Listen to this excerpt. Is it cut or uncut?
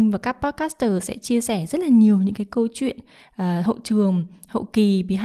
uncut